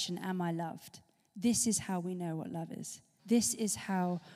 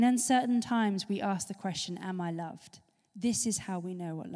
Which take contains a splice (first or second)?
first